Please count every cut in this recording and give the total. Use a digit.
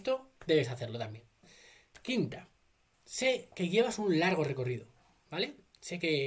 1